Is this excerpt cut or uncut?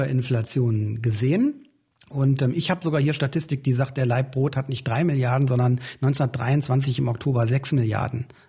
uncut